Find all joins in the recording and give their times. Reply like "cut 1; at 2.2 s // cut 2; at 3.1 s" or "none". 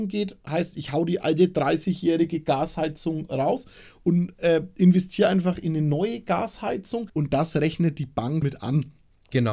cut 1; at 7.1 s // cut 2; at 8.4 s